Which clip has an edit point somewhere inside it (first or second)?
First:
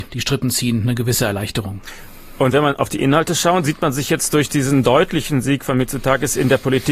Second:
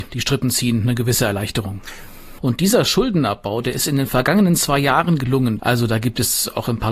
second